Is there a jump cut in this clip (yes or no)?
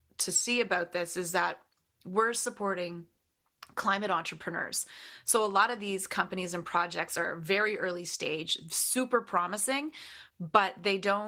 no